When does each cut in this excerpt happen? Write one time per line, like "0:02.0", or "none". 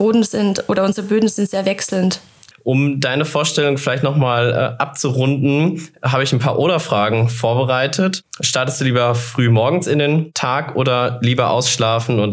0:02.5